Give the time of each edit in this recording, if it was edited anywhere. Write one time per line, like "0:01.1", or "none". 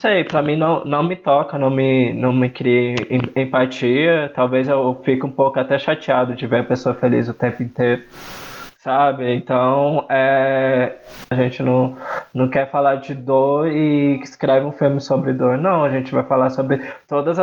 0:08.8
0:11.3

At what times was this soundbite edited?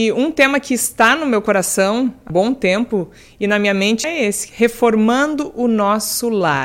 0:02.3
0:04.0

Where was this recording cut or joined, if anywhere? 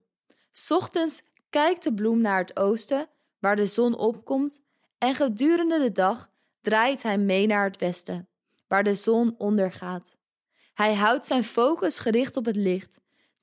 none

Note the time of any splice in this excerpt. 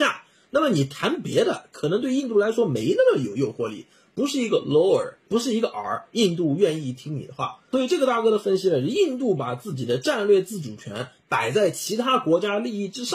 none

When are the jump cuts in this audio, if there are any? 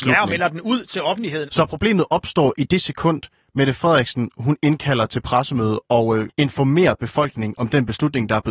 0:01.5

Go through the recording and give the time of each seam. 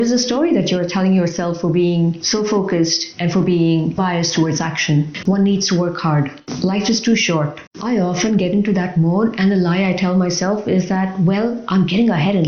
0:04.0
0:05.2
0:07.7

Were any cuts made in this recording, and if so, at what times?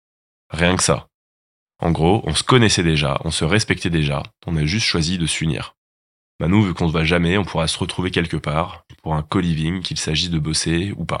0:06.3

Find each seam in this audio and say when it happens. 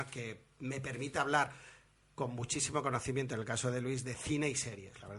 none

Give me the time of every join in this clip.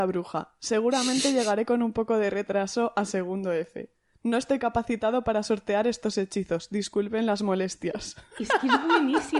none

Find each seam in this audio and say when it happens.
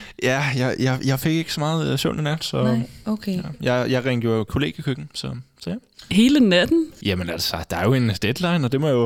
none

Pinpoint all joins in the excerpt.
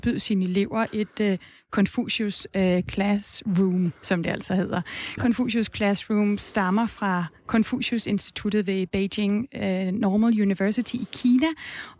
0:05.2

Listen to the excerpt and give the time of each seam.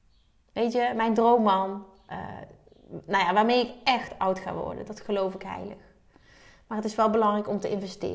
none

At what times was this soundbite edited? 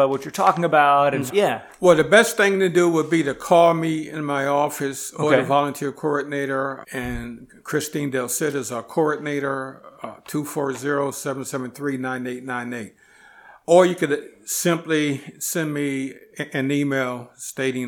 0:01.3
0:06.8

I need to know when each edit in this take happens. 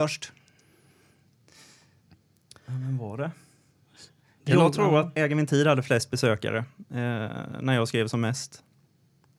0:05.2

